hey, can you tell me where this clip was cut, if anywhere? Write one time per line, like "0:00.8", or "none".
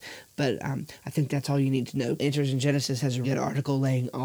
0:01.0
0:02.2
0:03.2